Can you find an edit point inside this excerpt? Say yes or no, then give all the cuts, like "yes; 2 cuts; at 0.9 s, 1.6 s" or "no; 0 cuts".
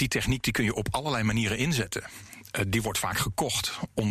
no; 0 cuts